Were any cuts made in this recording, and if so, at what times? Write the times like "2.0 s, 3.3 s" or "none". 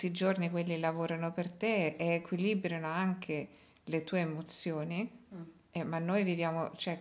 none